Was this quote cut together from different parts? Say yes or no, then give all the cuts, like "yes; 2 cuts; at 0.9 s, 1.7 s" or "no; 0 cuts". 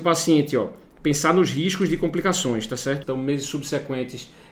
yes; 1 cut; at 3.0 s